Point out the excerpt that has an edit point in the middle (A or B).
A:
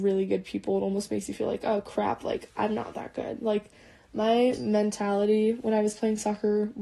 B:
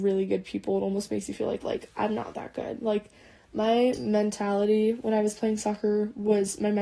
B